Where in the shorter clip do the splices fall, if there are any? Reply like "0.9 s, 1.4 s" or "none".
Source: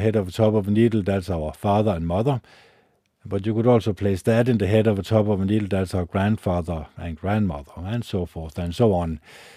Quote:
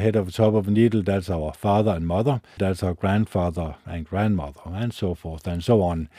2.6 s